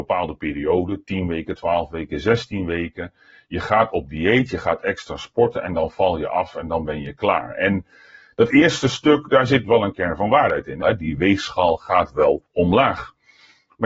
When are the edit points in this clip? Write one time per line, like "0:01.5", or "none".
0:10.8
0:12.5